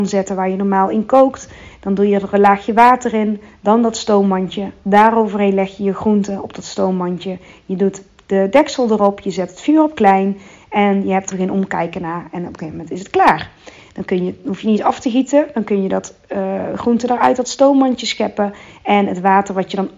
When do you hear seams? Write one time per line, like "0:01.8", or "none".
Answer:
0:11.3